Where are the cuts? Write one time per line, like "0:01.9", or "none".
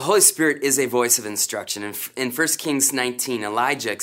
none